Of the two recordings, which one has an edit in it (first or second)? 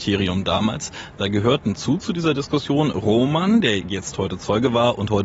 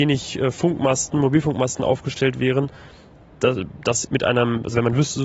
second